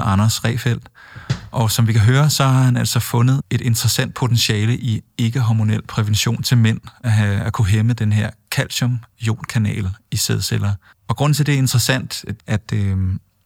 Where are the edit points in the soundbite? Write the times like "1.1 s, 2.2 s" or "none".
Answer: 7.0 s, 12.4 s